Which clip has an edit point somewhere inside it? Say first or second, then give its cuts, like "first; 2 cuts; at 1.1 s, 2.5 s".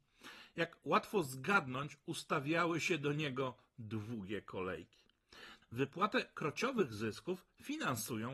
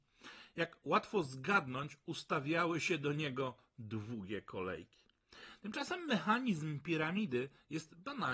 first; 1 cut; at 5.6 s